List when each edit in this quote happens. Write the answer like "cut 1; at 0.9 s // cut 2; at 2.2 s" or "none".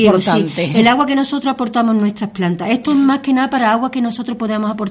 none